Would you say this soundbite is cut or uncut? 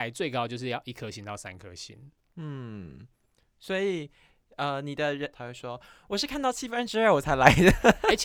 cut